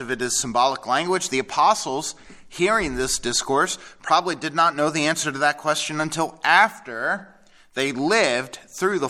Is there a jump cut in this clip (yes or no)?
no